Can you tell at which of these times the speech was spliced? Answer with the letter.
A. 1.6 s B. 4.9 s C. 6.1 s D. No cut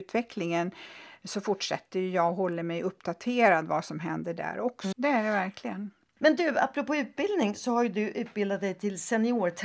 B